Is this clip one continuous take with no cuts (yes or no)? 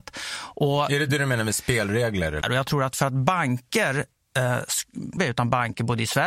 no